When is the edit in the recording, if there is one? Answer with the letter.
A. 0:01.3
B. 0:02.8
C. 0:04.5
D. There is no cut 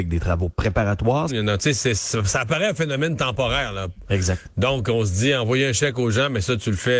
A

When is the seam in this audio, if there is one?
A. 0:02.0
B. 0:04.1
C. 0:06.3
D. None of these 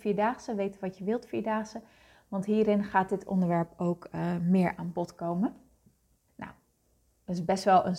C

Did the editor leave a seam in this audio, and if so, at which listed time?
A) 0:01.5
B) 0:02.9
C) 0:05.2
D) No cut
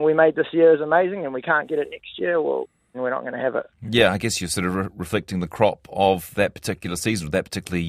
B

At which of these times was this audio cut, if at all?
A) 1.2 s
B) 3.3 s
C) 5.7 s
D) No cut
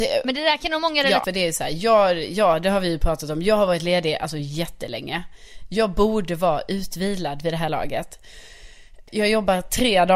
A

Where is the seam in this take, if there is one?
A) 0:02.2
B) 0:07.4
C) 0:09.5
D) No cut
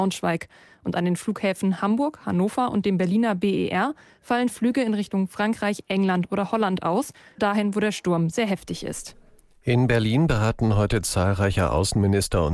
B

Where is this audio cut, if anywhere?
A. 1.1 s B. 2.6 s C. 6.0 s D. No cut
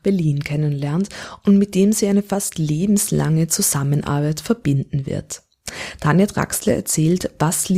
D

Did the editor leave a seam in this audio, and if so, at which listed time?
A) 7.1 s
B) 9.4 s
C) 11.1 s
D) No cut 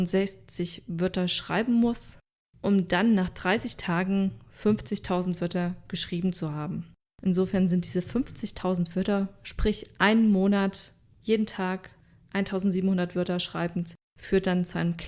A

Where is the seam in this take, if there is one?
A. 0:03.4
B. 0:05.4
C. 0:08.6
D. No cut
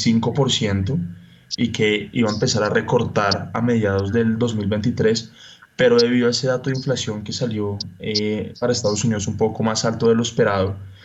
D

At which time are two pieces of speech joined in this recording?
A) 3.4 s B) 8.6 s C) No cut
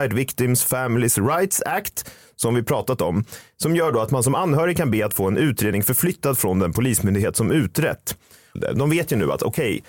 B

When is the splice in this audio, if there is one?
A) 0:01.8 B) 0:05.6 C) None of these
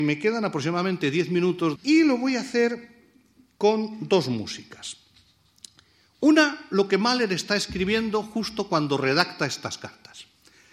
A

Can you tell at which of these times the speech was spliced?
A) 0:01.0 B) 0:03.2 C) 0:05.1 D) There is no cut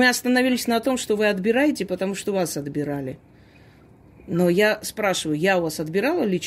D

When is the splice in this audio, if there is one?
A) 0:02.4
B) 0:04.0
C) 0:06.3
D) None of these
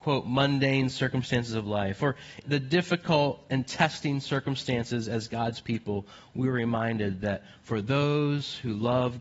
A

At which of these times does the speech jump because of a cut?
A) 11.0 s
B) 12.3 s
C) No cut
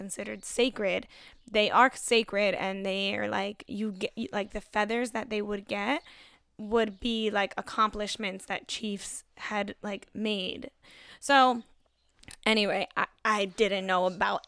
C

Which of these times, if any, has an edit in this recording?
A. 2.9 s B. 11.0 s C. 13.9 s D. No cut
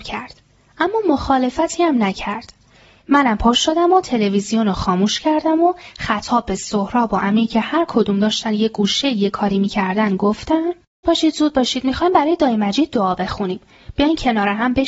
B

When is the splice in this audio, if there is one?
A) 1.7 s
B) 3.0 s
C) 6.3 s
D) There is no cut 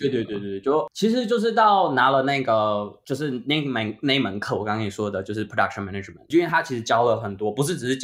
D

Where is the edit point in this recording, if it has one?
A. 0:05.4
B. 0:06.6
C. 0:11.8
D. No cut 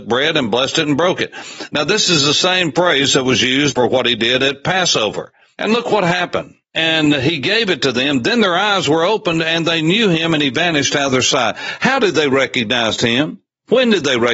B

